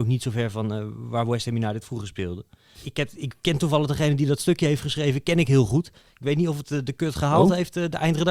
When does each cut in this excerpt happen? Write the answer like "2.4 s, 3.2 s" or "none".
2.7 s